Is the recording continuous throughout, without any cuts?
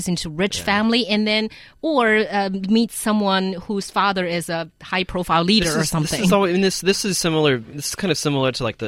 yes; 0 cuts

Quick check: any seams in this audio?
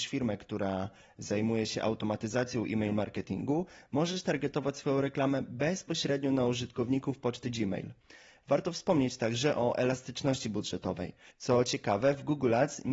yes; 1 cut; at 11.3 s

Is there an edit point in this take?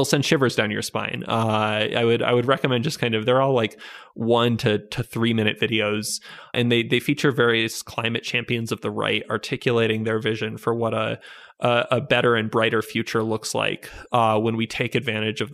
no; 0 cuts

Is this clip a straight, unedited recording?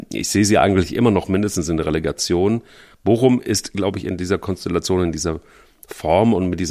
no; 1 cut; at 2.9 s

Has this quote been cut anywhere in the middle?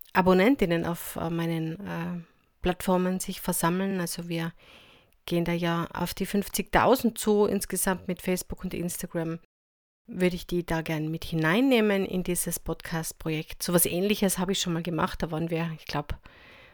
no; 0 cuts

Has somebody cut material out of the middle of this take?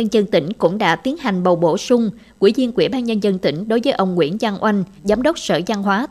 yes; 1 cut; at 5.0 s

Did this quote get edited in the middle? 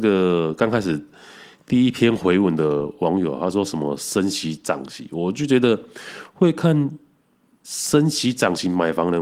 no; 0 cuts

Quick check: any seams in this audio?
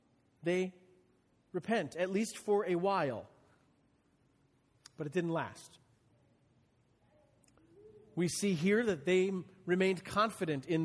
no; 0 cuts

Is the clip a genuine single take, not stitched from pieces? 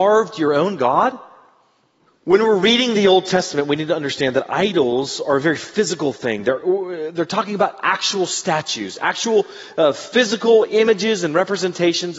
no; 1 cut; at 2.1 s

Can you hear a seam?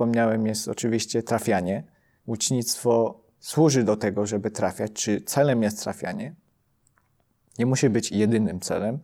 yes; 1 cut; at 2.2 s

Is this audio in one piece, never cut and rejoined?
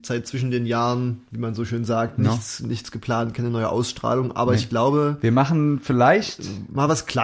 yes; 0 cuts

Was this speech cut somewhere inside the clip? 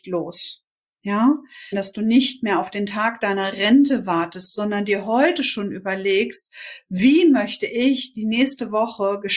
yes; 1 cut; at 1.7 s

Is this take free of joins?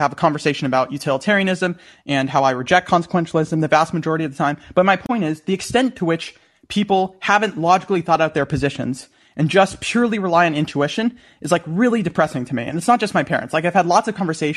yes; 0 cuts

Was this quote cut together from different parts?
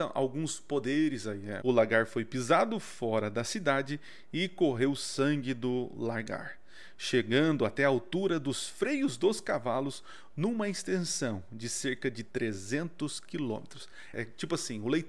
yes; 2 cuts; at 1.6 s, 14.1 s

